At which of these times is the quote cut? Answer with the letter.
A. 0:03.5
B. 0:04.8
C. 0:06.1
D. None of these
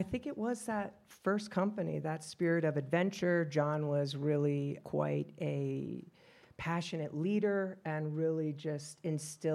B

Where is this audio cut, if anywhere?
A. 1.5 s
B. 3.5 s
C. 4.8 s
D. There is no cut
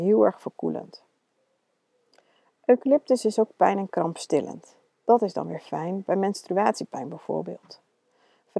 D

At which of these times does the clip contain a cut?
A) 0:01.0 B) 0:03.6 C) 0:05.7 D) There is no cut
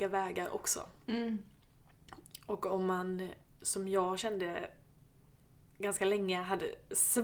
D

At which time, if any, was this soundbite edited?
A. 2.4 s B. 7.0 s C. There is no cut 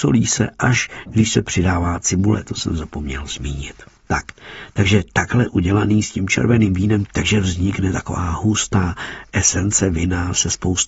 B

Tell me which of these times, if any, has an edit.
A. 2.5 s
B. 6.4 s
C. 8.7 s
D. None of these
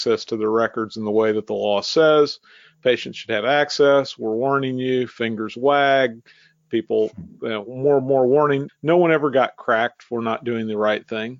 C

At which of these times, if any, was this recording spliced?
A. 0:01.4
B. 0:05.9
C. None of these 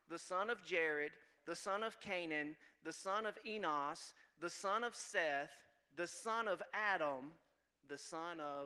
A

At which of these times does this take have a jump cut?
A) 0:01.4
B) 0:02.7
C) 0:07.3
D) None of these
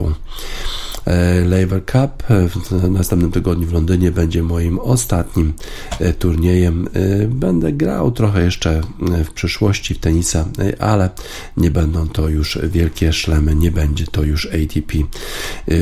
D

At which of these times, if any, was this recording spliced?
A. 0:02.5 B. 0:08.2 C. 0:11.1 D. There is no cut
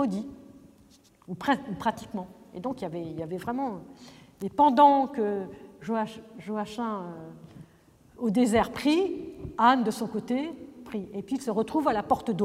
B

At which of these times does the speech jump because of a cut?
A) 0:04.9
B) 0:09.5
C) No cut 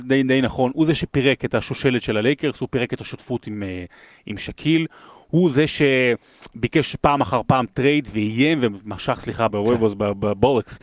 B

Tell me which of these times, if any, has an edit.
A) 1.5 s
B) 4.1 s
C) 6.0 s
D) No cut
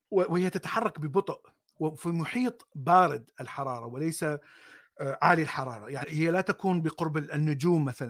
C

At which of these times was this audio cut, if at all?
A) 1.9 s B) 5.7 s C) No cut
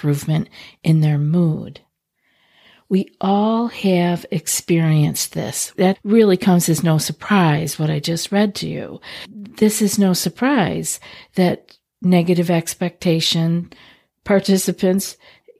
C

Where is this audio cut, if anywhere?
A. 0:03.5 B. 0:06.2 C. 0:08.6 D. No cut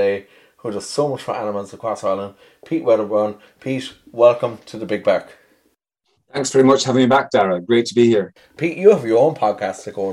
C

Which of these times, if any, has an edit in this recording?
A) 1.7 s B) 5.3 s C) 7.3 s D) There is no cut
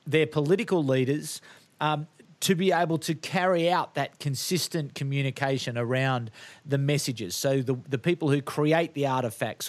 D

